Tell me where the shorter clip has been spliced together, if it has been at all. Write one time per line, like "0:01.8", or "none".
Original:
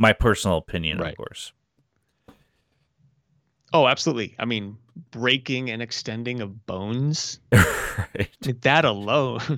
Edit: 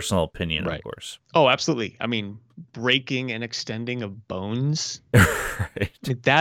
0:01.2